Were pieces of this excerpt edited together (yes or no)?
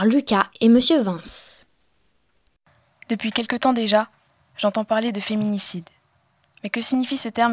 no